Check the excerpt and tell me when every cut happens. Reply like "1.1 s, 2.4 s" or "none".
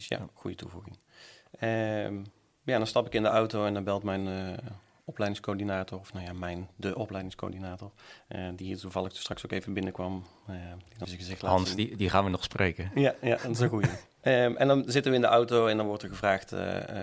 11.0 s, 14.1 s